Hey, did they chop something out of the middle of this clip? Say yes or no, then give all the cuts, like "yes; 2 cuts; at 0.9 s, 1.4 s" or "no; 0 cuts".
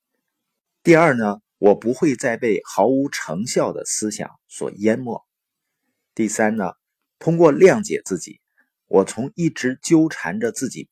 yes; 1 cut; at 1.4 s